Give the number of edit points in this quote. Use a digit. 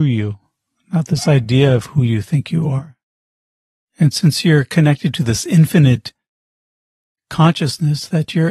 0